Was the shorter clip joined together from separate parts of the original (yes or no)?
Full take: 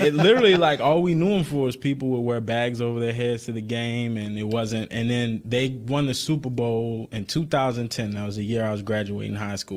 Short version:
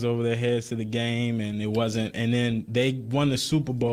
no